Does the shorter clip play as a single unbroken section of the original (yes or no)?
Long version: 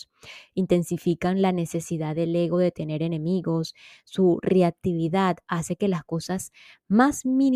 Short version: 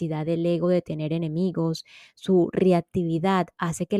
yes